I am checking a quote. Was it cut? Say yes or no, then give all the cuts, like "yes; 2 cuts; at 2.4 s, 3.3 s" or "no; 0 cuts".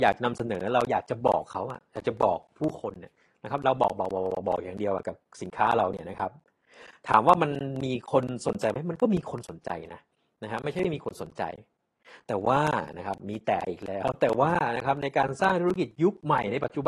no; 0 cuts